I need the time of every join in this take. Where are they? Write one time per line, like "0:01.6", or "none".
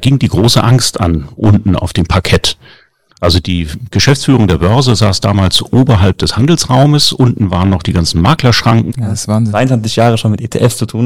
0:01.4
0:08.9